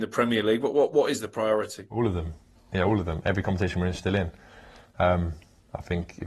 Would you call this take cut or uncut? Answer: uncut